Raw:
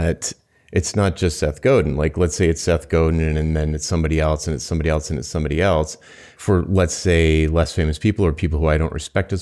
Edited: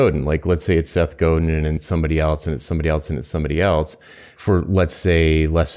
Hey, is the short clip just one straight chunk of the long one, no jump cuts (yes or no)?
no